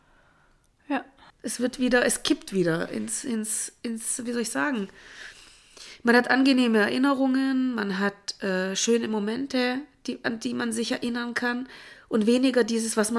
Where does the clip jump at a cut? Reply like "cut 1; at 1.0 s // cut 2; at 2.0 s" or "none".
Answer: cut 1; at 1.3 s